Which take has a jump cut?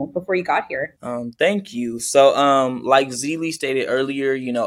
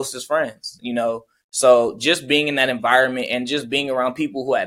first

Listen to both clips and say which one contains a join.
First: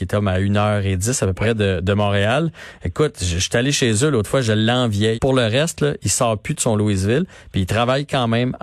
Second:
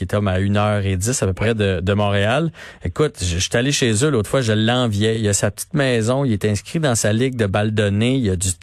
first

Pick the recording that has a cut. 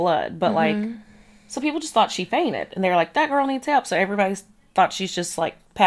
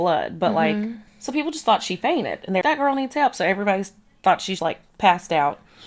second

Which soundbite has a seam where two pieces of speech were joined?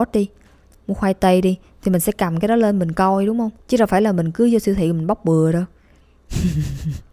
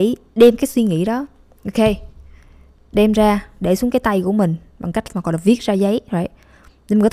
first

